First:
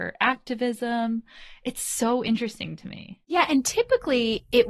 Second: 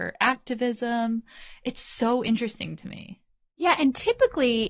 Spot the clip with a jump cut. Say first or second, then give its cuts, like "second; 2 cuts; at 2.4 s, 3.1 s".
first; 1 cut; at 3.2 s